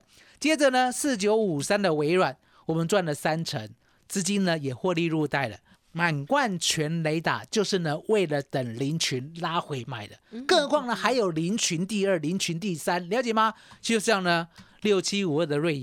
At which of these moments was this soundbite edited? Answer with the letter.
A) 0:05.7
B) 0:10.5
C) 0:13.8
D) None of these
A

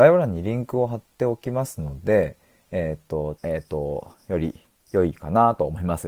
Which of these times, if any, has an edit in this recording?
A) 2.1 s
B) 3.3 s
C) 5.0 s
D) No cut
B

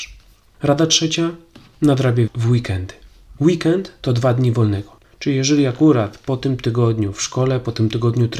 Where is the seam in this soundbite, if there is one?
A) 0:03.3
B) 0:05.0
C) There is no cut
B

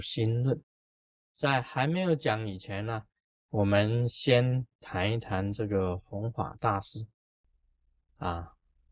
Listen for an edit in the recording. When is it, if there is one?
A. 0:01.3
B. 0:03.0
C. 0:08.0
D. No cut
C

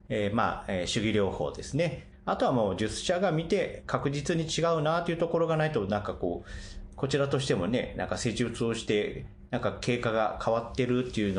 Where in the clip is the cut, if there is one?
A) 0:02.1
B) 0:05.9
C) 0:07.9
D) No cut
A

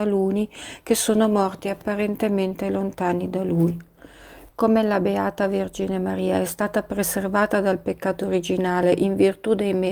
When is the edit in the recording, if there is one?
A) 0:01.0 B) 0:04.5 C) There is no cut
B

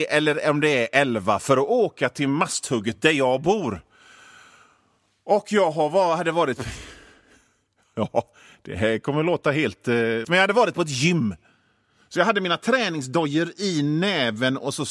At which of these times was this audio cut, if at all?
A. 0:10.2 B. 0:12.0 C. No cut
A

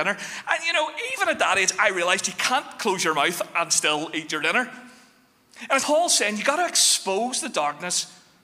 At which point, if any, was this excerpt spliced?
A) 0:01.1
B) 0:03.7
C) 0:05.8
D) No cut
C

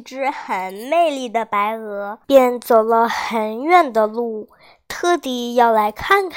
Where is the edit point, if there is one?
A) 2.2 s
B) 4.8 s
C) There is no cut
A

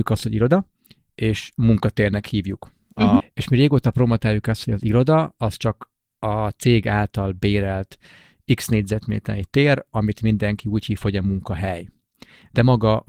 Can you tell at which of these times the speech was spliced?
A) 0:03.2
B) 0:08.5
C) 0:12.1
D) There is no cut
A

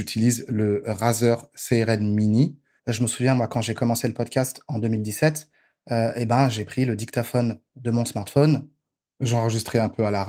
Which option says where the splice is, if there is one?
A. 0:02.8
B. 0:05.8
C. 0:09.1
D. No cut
A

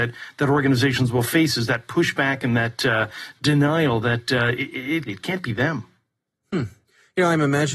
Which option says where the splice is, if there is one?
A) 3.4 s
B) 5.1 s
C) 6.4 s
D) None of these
B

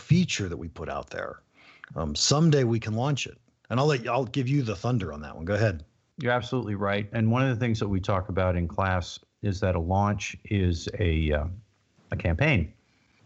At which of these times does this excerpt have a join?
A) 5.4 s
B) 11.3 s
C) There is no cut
C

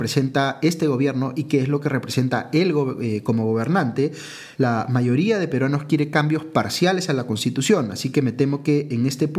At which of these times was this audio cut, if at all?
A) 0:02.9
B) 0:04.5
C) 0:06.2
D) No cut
B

